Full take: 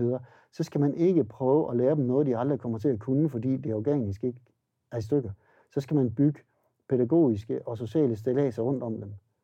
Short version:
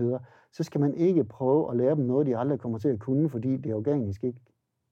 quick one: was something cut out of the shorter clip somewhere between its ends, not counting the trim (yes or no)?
no